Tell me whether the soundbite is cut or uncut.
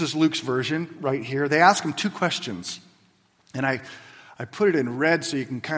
uncut